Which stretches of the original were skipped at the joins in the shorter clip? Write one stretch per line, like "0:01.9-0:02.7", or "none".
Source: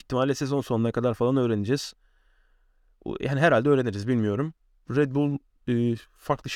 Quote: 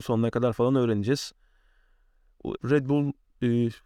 0:03.2-0:04.8